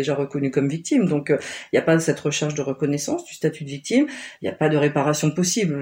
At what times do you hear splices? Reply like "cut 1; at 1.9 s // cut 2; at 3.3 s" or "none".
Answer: none